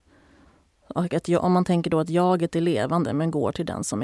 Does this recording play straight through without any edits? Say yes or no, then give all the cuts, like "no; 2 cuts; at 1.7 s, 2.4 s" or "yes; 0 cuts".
yes; 0 cuts